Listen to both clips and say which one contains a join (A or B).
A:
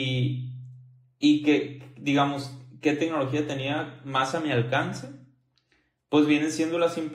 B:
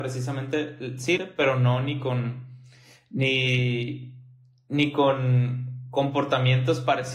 B